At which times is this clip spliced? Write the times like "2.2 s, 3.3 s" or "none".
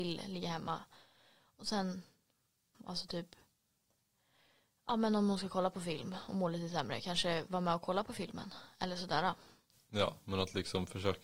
2.7 s